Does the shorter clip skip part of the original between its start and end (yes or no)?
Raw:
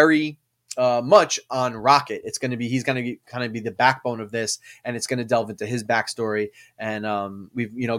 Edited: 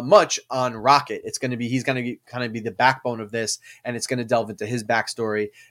no